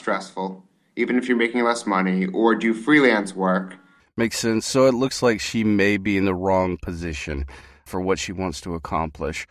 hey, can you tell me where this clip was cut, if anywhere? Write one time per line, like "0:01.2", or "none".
0:04.0
0:07.9